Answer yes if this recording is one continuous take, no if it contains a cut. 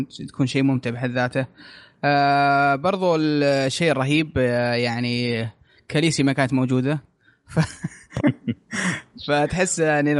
no